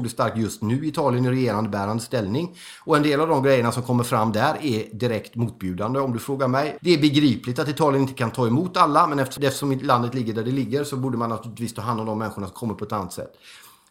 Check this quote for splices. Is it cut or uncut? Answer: cut